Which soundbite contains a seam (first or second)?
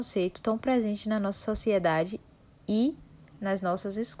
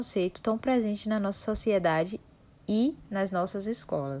second